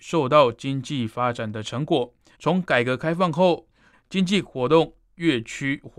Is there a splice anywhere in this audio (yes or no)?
yes